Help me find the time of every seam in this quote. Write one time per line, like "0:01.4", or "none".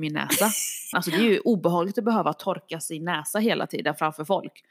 0:00.9